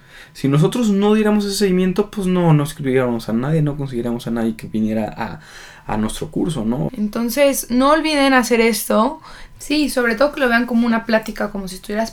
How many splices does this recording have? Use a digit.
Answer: 2